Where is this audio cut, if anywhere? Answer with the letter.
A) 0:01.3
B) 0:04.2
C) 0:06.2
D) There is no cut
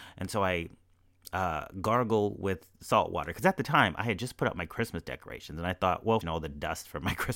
C